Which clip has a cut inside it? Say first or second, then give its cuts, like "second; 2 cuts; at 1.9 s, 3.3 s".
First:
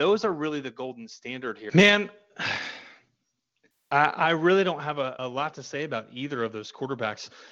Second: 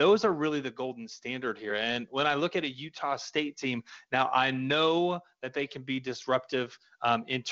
first; 2 cuts; at 1.7 s, 5.2 s